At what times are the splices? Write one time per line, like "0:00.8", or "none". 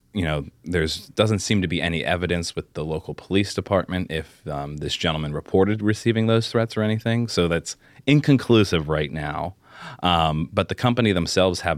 none